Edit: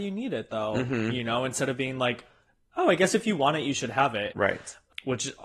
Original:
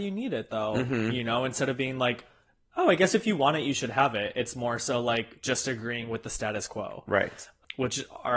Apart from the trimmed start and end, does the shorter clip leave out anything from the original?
yes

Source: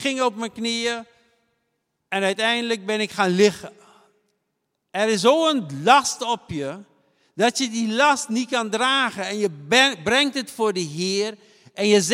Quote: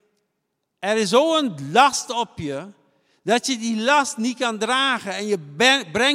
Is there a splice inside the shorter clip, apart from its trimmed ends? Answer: no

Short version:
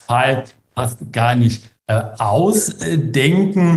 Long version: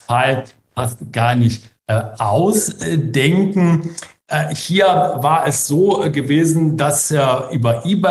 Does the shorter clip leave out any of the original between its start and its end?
no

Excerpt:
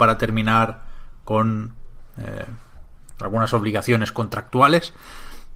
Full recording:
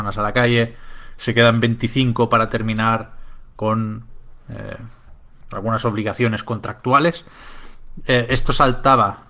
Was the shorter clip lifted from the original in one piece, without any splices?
yes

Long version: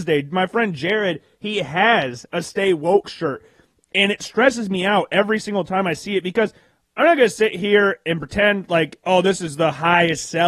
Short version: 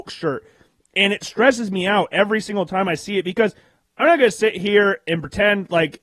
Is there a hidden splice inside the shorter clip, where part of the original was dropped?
no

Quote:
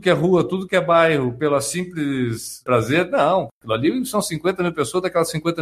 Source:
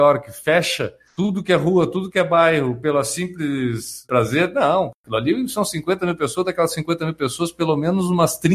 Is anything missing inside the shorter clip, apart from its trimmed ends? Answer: no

